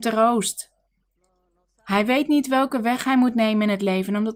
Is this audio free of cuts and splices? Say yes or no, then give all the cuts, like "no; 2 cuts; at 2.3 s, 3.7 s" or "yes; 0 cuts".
yes; 0 cuts